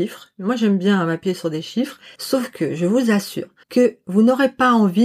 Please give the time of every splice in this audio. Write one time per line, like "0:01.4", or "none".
0:02.1
0:03.6

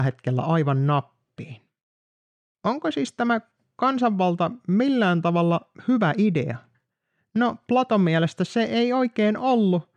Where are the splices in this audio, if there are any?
none

